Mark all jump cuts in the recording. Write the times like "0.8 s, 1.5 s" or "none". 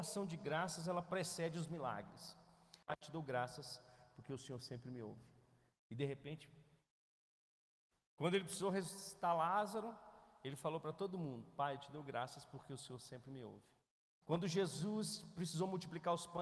2.8 s, 14.2 s